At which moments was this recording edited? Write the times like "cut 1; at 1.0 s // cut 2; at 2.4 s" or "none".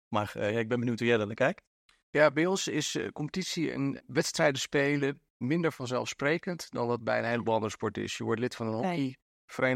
cut 1; at 4.0 s